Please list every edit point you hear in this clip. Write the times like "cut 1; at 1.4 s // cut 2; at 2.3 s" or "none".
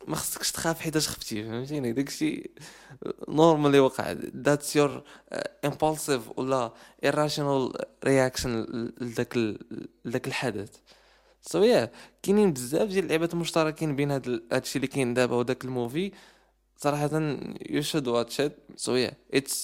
none